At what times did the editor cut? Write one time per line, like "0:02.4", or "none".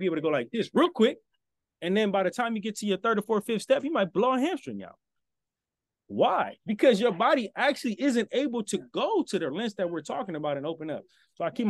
none